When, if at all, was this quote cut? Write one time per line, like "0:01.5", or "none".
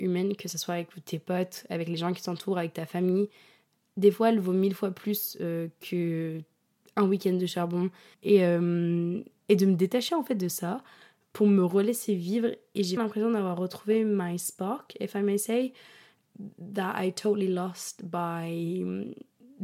0:08.1
0:13.0